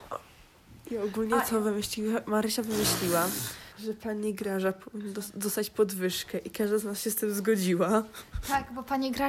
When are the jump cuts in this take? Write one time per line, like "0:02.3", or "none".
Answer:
0:03.7